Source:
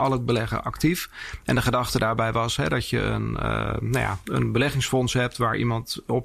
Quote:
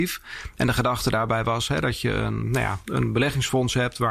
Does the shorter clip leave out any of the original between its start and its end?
yes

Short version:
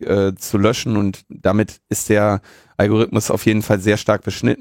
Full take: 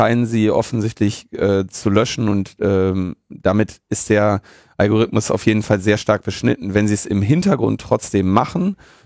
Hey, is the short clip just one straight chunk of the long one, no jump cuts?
no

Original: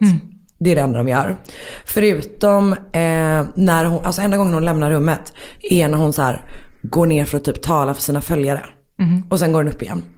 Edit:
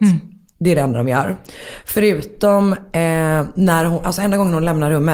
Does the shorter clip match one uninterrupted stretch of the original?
yes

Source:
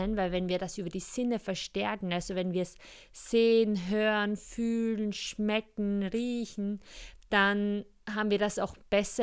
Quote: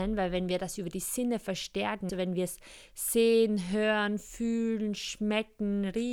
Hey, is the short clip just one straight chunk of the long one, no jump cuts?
no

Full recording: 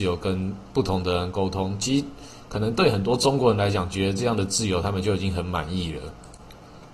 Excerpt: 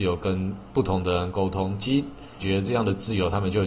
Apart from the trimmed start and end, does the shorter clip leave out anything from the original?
yes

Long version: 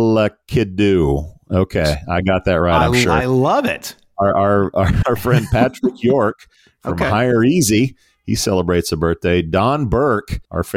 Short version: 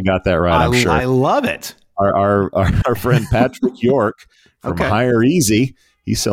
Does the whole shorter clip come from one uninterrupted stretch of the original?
yes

